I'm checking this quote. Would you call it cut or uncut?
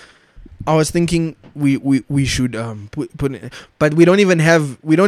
uncut